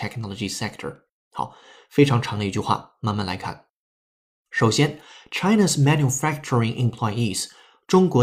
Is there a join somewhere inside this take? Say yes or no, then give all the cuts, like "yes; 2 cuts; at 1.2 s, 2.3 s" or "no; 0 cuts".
no; 0 cuts